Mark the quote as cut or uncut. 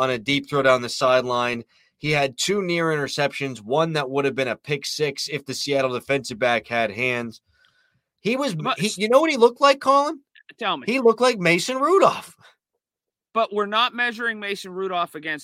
uncut